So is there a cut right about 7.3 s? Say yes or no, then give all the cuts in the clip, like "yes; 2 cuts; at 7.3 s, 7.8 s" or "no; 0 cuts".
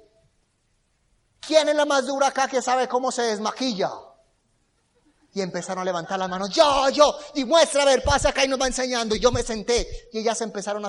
no; 0 cuts